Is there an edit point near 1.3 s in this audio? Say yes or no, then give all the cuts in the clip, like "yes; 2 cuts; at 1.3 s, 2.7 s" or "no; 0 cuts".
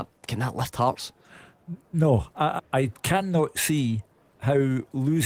no; 1 cut; at 2.6 s